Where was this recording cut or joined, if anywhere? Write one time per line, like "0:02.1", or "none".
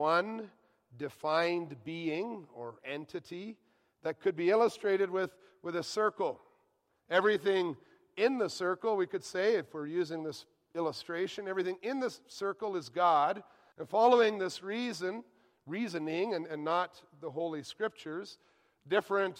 0:06.9
0:13.7